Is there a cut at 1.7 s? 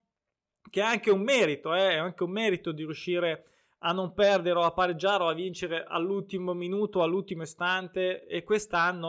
no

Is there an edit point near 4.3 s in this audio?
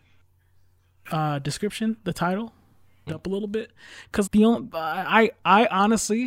yes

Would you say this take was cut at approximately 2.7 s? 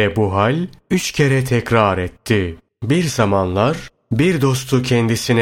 yes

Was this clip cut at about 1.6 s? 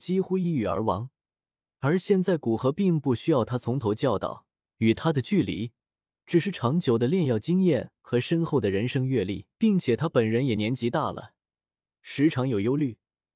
yes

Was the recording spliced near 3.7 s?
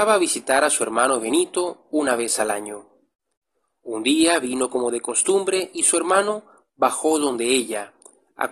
no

